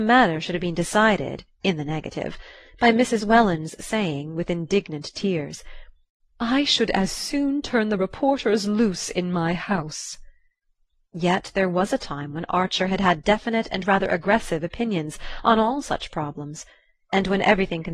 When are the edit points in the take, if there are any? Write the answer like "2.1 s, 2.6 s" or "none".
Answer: none

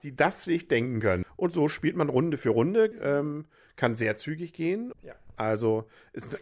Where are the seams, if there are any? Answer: 1.2 s, 2.9 s, 4.9 s

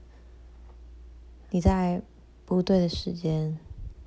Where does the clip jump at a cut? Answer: 1.5 s

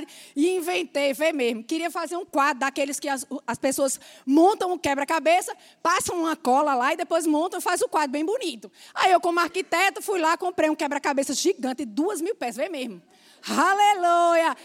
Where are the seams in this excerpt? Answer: none

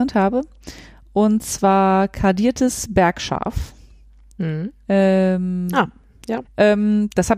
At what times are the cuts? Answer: 6.4 s

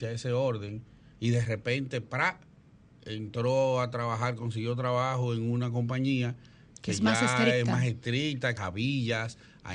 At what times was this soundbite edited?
8.6 s

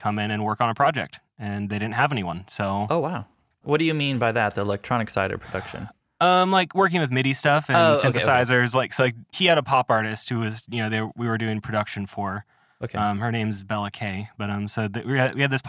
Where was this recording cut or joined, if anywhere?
9.3 s

